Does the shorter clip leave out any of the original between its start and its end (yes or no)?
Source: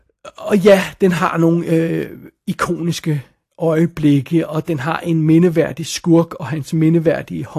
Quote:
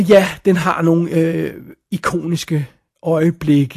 no